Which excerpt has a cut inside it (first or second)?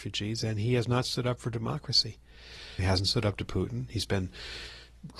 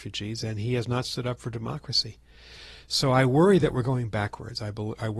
first